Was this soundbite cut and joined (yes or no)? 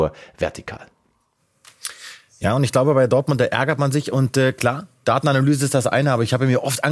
no